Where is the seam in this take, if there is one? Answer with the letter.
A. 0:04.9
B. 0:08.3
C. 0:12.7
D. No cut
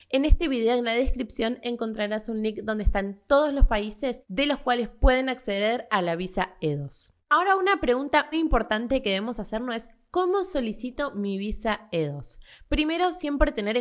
B